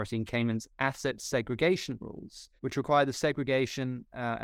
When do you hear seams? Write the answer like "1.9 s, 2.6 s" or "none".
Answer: 2.6 s

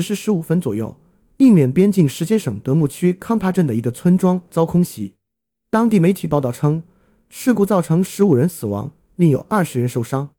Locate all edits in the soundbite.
9.0 s

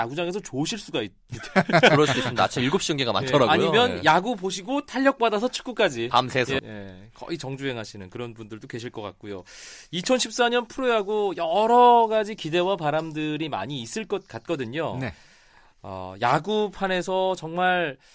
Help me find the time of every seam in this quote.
6.6 s

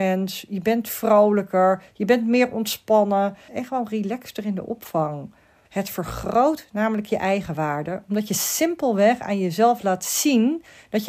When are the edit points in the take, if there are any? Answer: 3.5 s, 5.7 s

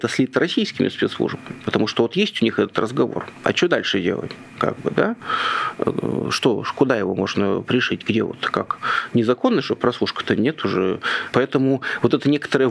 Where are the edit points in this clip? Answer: 11.3 s

